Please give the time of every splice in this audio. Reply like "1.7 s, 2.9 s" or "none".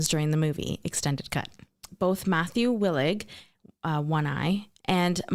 1.9 s